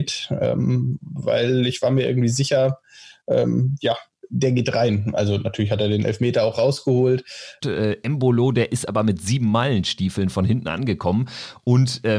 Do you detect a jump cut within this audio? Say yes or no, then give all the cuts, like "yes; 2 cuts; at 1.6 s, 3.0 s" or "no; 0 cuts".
yes; 2 cuts; at 4.2 s, 7.6 s